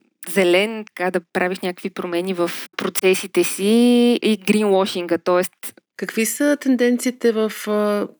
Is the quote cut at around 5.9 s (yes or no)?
yes